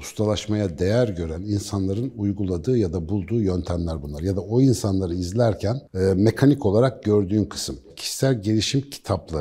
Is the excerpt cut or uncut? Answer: cut